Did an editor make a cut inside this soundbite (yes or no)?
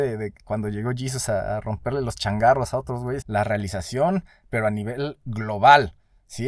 yes